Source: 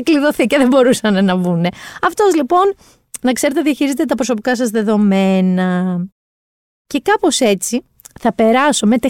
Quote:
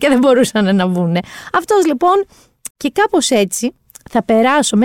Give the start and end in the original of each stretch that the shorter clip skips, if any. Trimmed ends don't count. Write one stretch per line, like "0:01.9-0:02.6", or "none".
0:03.2-0:06.8